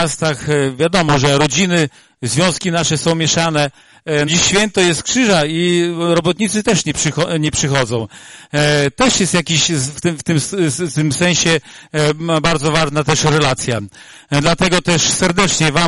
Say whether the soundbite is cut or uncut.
cut